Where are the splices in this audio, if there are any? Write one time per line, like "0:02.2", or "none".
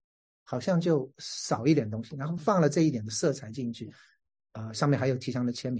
0:02.4
0:04.4